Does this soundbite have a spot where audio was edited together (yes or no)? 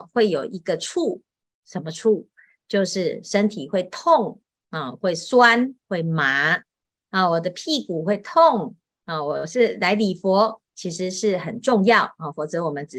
yes